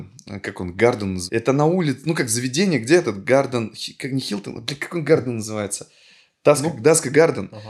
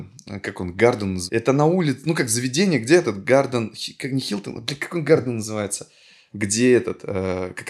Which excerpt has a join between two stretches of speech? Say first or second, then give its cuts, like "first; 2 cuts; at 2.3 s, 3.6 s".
second; 1 cut; at 6.3 s